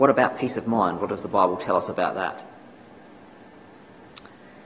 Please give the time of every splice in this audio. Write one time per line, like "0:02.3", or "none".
none